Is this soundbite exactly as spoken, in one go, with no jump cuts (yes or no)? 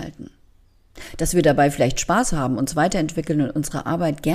yes